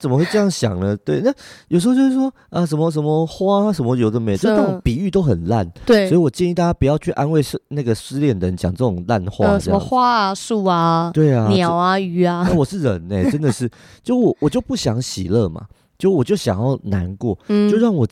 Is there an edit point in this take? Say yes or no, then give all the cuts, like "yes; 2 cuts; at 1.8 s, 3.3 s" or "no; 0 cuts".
no; 0 cuts